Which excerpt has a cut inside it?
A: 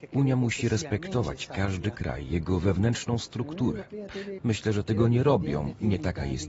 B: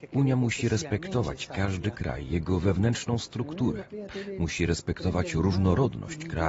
A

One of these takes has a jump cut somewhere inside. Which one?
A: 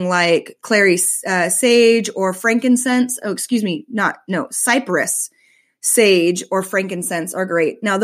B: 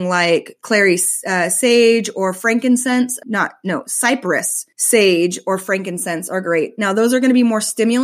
B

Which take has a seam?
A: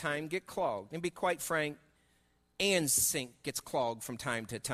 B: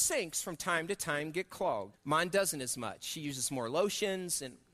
B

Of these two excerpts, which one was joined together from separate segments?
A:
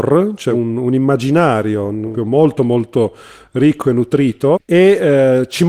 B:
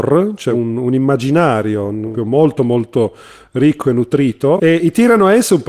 A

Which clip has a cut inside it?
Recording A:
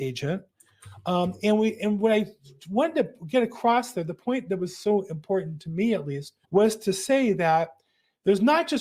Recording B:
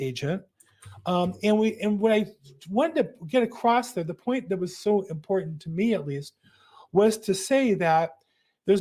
A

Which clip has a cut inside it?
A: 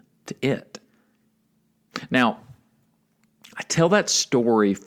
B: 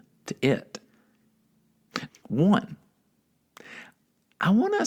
B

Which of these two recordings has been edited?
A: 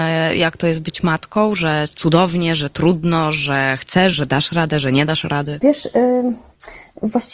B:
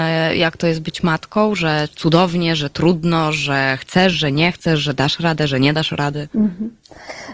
A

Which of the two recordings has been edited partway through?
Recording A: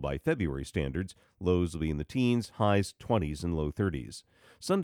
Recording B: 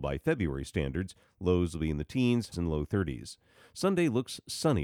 B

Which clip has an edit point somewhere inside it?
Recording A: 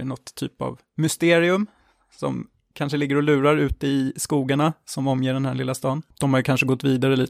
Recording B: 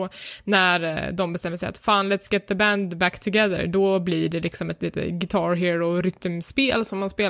A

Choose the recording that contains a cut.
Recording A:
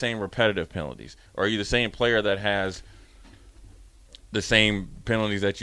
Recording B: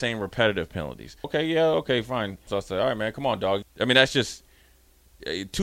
B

